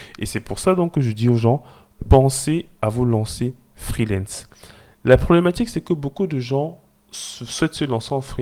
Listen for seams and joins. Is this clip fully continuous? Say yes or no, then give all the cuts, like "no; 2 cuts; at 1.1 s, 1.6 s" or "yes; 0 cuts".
yes; 0 cuts